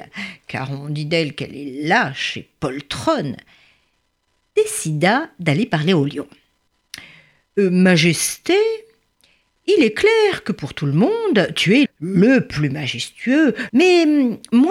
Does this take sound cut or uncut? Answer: cut